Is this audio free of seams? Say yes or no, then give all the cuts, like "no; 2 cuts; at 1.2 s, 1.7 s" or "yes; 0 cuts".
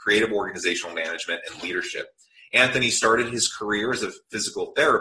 yes; 0 cuts